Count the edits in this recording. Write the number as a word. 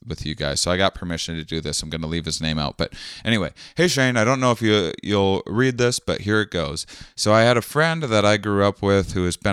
zero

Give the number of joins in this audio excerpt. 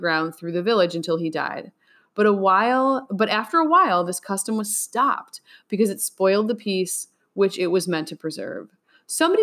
zero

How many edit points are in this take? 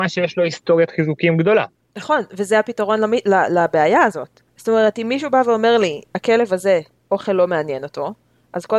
two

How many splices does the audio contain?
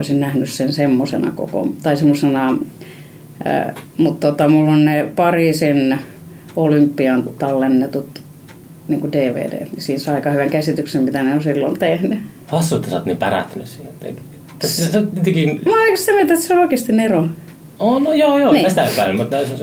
zero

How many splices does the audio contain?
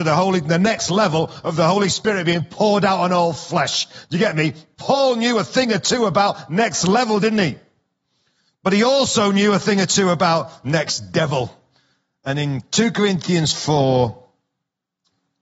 zero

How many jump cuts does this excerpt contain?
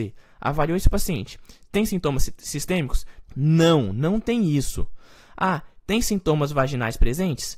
one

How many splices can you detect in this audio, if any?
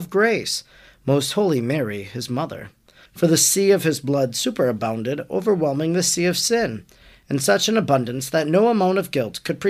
one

